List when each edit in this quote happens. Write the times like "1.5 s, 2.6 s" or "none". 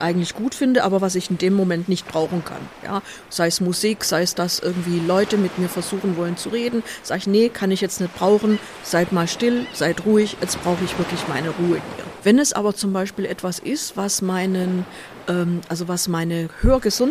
12.2 s

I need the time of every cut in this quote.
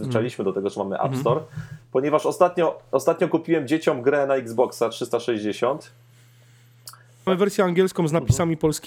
7.3 s

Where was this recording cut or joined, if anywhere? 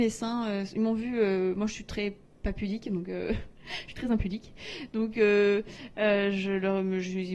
none

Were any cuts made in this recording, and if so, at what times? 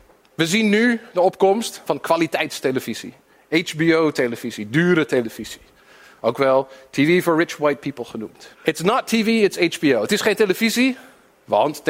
1.9 s, 8.5 s

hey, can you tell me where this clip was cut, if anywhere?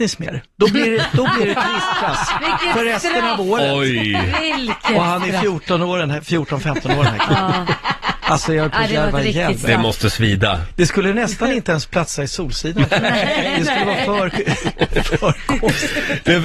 none

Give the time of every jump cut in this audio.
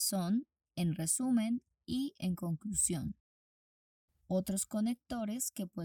none

